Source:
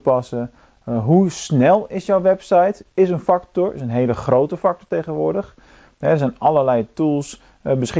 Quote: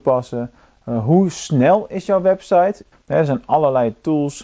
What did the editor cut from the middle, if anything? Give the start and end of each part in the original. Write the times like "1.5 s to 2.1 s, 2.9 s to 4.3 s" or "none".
2.9 s to 5.8 s